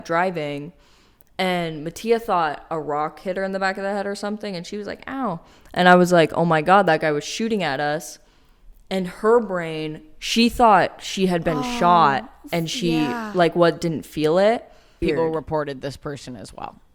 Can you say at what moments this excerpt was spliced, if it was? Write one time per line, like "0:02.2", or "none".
0:15.0